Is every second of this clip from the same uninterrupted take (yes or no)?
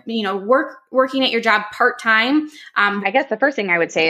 no